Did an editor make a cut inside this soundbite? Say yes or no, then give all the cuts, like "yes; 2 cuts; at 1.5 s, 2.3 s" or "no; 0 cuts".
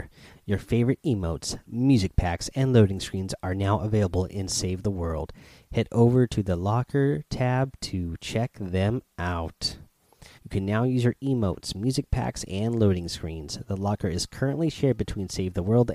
yes; 1 cut; at 10.4 s